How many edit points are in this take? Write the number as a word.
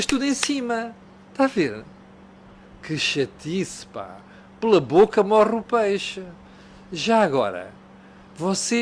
zero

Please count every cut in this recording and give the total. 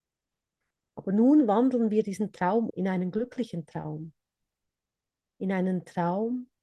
one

